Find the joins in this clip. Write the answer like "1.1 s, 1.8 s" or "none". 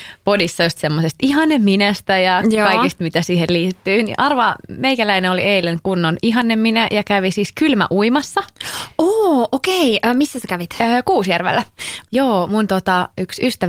12.1 s